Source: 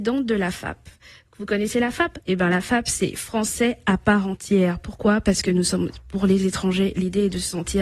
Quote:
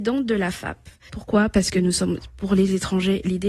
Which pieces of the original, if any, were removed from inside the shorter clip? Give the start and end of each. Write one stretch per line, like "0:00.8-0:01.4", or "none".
0:01.1-0:04.8